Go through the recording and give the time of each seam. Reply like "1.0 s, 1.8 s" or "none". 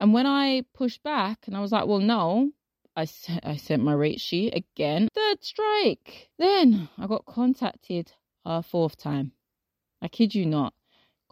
5.1 s